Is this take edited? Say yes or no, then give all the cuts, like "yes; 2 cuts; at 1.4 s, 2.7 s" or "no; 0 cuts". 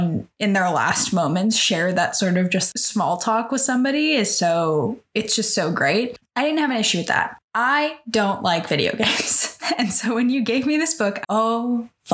yes; 1 cut; at 11.2 s